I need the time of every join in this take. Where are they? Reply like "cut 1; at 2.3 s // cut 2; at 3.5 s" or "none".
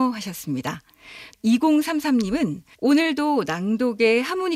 cut 1; at 2.7 s